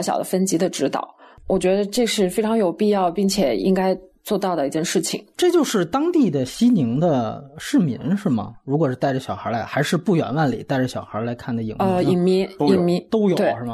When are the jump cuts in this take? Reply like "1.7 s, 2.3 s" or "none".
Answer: none